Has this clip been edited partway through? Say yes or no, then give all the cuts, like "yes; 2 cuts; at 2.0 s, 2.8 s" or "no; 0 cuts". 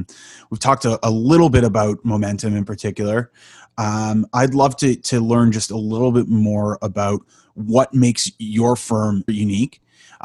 yes; 1 cut; at 9.3 s